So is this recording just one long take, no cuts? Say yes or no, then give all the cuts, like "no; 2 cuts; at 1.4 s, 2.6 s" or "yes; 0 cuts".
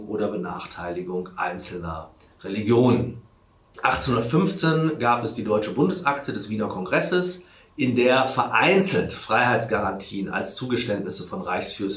no; 1 cut; at 3.7 s